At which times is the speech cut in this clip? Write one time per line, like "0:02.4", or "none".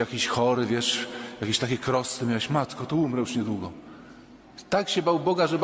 none